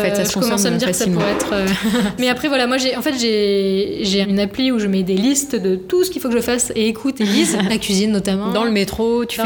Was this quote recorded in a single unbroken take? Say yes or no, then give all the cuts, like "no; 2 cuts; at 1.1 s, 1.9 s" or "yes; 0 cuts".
no; 3 cuts; at 2.2 s, 4.2 s, 7.7 s